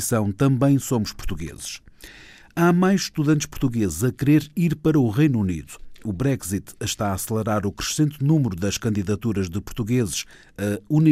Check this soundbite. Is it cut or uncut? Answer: uncut